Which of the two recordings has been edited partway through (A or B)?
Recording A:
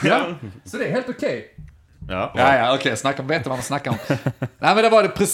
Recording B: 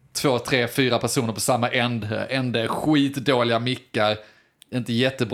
A